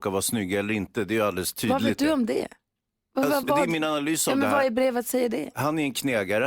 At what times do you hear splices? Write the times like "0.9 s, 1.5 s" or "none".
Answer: 3.4 s